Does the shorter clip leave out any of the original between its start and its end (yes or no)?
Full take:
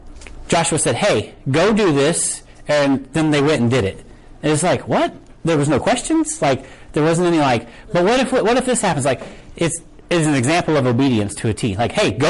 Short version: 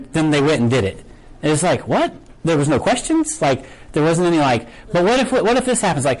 no